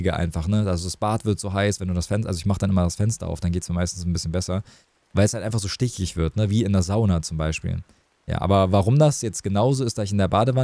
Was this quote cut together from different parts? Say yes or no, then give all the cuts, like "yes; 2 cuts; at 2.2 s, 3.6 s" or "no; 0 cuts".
no; 0 cuts